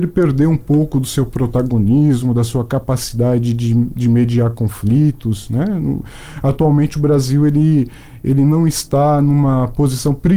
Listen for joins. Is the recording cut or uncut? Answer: uncut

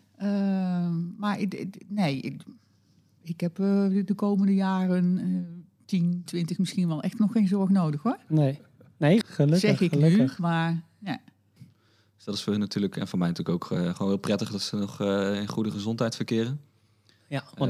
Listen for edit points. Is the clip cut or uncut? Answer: cut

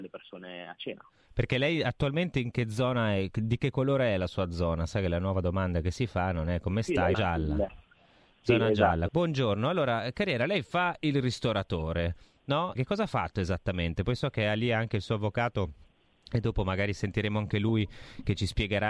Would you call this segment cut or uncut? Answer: cut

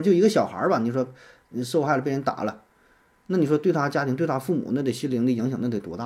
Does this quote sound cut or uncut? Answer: uncut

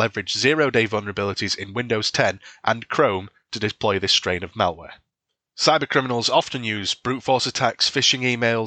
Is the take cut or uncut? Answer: uncut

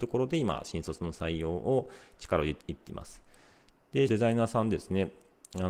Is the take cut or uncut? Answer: cut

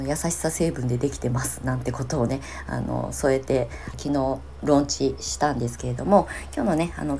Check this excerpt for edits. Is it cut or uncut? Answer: cut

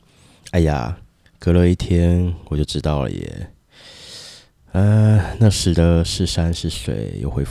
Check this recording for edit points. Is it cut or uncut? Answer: uncut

